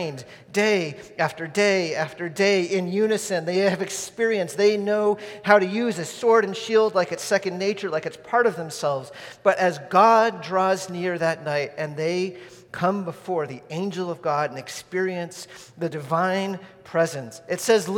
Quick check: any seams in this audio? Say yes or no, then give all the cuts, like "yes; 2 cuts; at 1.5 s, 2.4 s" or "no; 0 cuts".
no; 0 cuts